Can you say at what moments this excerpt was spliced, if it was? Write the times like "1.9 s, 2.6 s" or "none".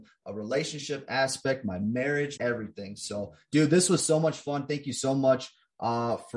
2.4 s